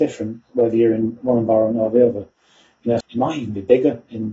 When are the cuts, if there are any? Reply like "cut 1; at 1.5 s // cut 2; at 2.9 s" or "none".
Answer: cut 1; at 3.0 s